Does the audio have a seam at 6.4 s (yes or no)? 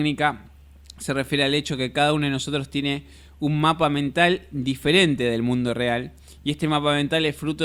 no